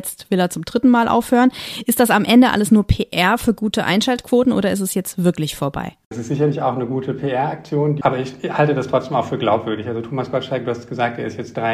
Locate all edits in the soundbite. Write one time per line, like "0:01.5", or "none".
none